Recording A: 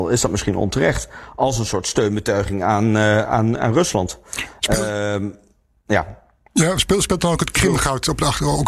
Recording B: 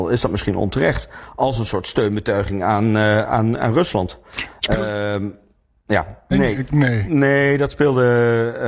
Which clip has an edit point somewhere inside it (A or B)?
B